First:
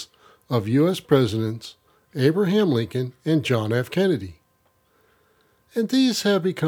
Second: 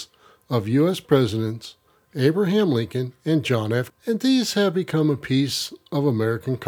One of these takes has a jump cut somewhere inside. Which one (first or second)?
second